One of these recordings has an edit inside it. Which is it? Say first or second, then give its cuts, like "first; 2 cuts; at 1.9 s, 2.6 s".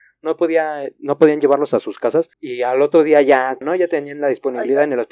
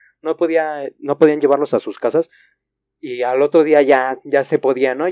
first; 2 cuts; at 2.3 s, 3.6 s